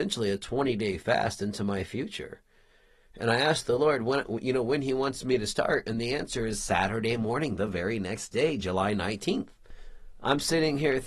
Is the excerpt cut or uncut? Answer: uncut